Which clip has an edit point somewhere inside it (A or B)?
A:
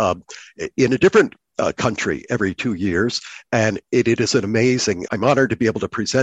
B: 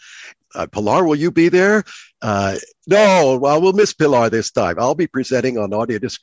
A